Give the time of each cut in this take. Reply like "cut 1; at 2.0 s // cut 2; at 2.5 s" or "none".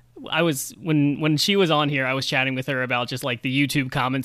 none